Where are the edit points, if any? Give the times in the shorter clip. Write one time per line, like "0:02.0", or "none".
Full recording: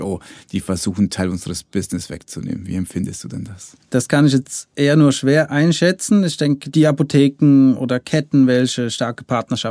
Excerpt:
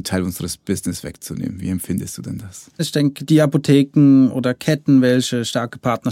0:02.8